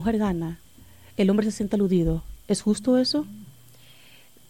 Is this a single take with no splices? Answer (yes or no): yes